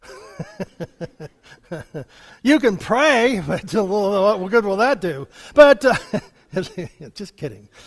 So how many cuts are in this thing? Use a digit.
0